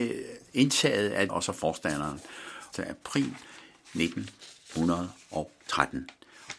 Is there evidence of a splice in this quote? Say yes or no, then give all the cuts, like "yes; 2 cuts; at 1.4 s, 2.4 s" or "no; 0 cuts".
yes; 2 cuts; at 1.3 s, 2.7 s